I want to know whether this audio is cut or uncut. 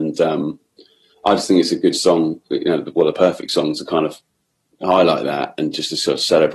uncut